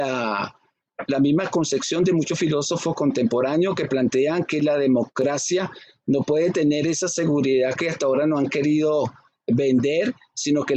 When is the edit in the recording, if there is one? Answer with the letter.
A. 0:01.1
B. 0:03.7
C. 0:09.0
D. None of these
A